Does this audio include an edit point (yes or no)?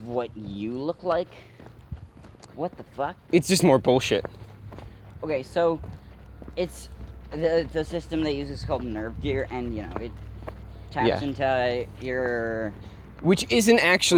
yes